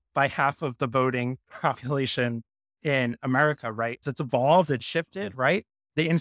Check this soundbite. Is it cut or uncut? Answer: cut